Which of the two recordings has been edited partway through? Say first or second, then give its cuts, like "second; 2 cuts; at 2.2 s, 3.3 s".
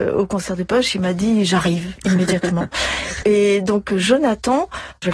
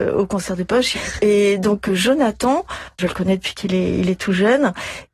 second; 1 cut; at 0.9 s